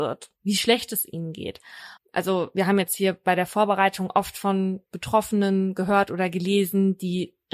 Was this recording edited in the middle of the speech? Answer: yes; 1 cut; at 2.0 s

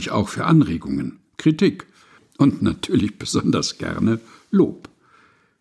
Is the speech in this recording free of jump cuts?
no; 1 cut; at 1.2 s

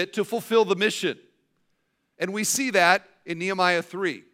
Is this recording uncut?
yes; 0 cuts

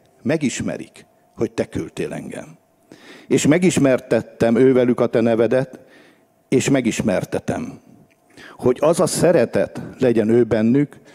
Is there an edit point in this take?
no; 0 cuts

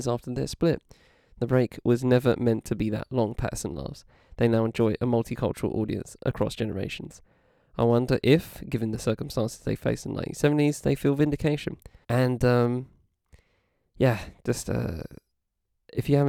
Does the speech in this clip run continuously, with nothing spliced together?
no; 1 cut; at 12.0 s

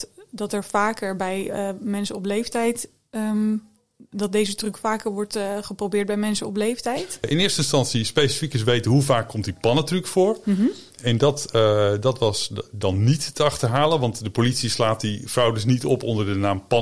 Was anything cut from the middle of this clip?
yes; 1 cut; at 7.2 s

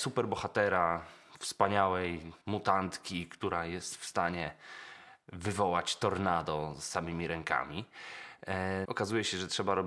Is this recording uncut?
no; 2 cuts; at 2.4 s, 8.8 s

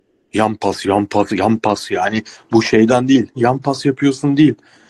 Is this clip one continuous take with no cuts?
no; 2 cuts; at 1.3 s, 3.3 s

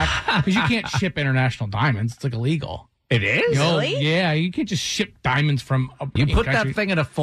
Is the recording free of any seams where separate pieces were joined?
no; 1 cut; at 6.2 s

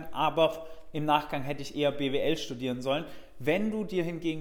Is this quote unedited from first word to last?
yes; 0 cuts

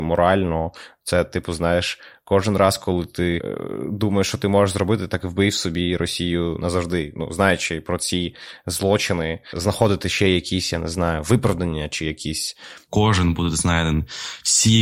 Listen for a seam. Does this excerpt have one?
yes; 1 cut; at 12.9 s

